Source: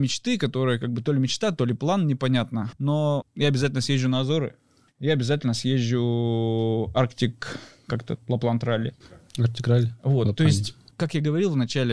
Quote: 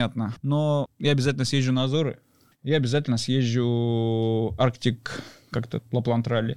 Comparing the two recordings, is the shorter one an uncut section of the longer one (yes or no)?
yes